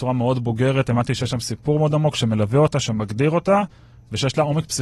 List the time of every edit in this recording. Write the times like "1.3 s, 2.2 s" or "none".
none

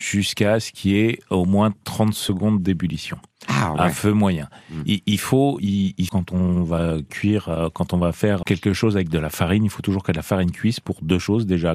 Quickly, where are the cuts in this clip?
6.1 s, 8.4 s

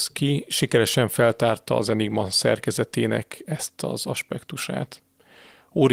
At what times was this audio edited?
none

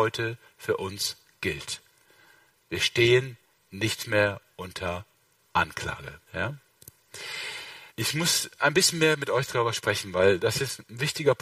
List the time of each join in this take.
6.3 s, 7.9 s

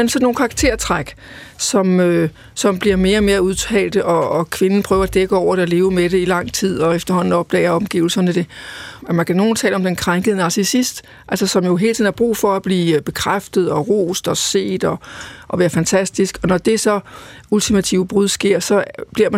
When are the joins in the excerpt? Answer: 9.0 s

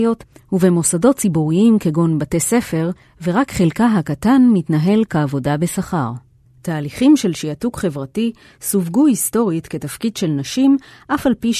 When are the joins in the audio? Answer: 6.5 s

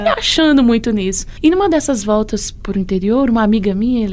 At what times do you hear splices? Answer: none

